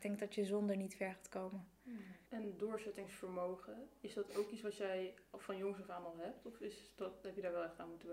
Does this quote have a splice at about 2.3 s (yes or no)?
yes